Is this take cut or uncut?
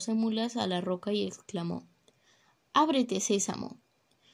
uncut